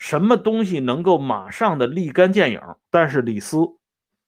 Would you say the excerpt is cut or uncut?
cut